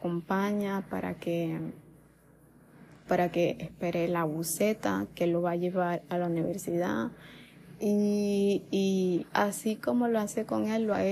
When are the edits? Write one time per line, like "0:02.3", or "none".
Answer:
0:03.1